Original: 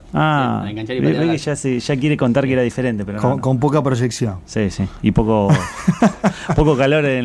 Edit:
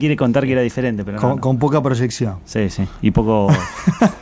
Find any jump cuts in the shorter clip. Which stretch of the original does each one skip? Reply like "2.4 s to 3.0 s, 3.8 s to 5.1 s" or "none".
none